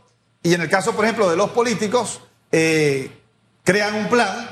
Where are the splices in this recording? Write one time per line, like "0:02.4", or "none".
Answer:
none